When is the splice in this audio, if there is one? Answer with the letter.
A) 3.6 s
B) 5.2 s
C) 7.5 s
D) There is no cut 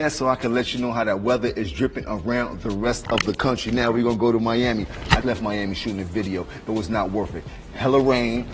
B